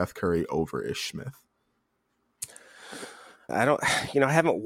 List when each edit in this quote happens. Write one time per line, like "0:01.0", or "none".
0:03.5